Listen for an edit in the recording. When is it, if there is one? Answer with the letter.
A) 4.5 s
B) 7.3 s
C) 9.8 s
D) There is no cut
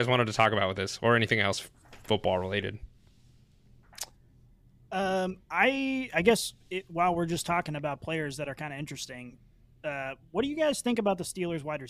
D